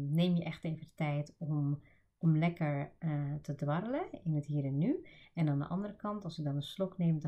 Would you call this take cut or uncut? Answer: uncut